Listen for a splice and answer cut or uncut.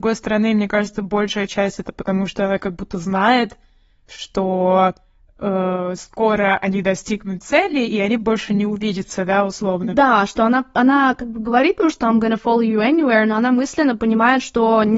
uncut